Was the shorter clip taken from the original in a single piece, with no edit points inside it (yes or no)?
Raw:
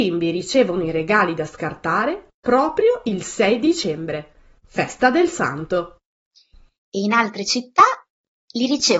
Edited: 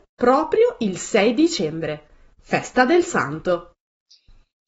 yes